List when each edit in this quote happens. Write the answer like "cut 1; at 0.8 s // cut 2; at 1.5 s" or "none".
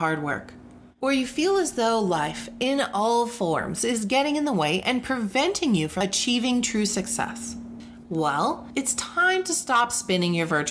none